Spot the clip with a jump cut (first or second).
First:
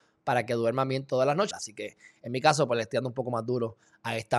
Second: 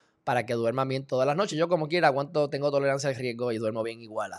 first